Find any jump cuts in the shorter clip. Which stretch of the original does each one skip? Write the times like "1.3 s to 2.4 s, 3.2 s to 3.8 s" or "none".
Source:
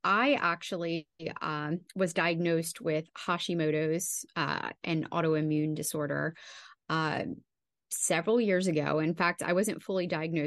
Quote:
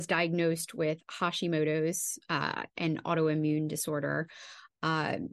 none